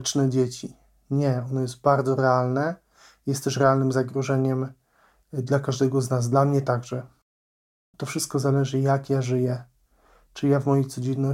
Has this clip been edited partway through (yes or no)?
no